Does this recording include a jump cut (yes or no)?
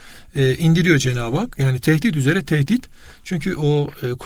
no